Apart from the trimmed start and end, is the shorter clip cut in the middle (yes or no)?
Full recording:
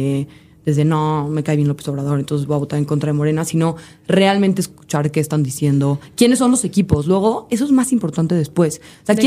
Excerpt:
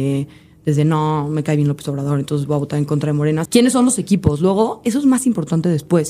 yes